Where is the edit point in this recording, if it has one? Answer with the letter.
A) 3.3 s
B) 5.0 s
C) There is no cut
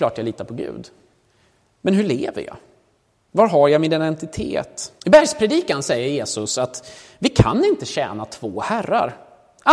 B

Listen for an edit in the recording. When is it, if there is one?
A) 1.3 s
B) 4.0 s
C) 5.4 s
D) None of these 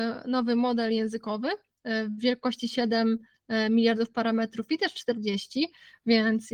D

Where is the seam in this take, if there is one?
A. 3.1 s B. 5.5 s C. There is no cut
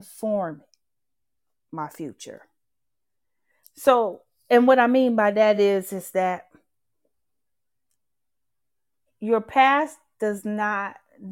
C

